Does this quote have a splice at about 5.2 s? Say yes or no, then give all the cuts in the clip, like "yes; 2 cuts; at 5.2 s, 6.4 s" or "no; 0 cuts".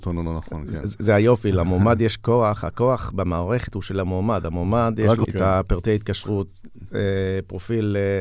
yes; 1 cut; at 5.2 s